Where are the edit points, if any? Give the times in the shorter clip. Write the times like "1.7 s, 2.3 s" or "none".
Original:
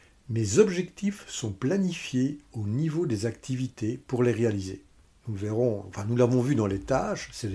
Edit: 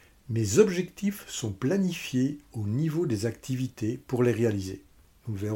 none